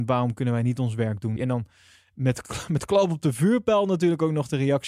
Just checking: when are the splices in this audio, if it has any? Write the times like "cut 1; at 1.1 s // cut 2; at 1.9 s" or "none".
cut 1; at 1.4 s